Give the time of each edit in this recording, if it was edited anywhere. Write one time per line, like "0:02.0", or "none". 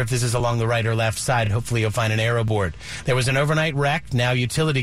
none